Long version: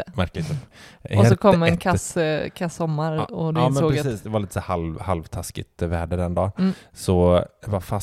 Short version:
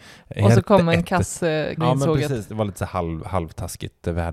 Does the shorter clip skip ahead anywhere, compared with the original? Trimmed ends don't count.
yes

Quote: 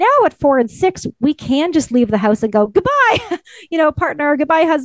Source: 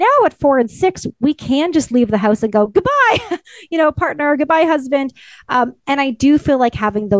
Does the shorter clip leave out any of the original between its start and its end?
no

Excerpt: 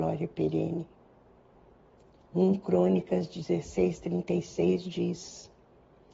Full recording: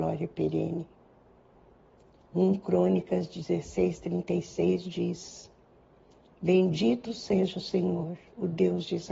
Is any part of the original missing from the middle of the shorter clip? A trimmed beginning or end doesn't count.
no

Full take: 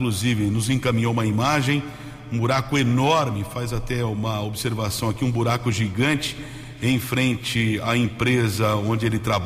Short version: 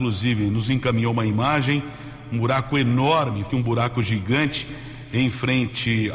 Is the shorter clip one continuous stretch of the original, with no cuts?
no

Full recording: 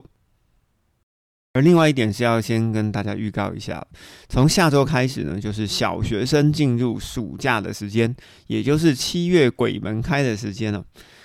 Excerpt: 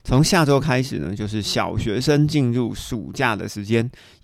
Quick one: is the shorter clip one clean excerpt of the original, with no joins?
yes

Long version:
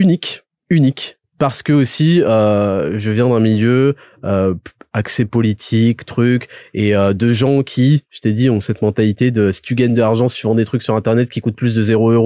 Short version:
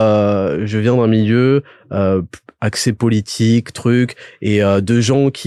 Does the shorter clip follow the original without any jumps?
yes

